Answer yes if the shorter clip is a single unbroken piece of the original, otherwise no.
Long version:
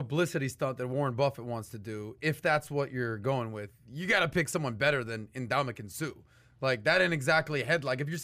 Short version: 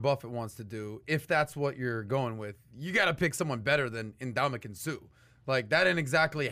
yes